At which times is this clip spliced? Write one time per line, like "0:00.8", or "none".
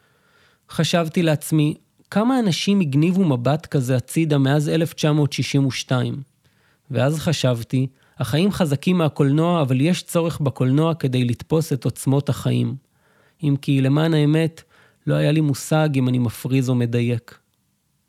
none